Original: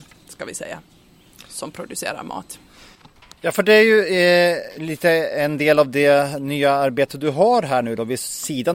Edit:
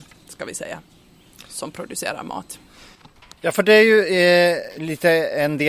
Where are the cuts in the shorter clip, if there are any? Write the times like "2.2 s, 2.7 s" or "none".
none